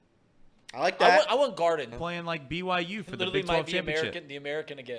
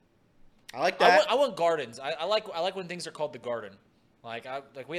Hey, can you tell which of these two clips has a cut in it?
first; 1 cut; at 1.9 s

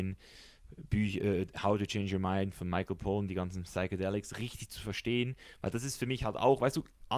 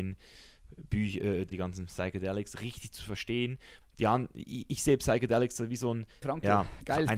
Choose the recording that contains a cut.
second; 3 cuts; at 1.5 s, 3.8 s, 6.2 s

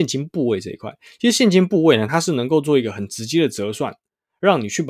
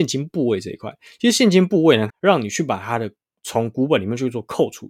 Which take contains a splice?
second; 1 cut; at 2.1 s

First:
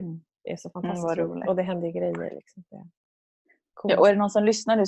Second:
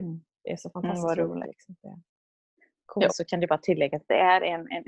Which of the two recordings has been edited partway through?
second; 2 cuts; at 1.4 s, 3.1 s

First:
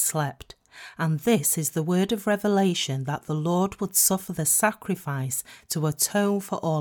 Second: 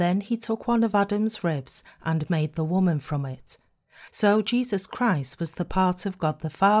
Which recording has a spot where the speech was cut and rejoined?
second; 1 cut; at 4.1 s

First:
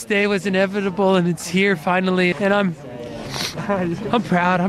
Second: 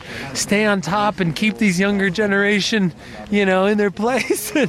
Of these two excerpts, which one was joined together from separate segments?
first; 1 cut; at 2.3 s

